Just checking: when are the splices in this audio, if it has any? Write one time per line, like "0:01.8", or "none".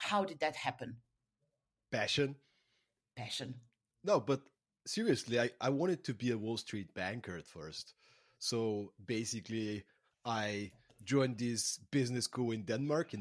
none